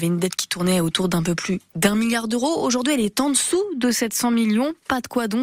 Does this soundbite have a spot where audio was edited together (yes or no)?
no